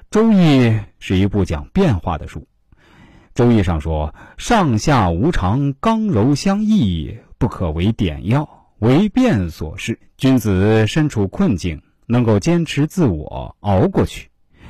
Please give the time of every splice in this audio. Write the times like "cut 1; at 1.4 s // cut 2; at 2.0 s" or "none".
cut 1; at 10.0 s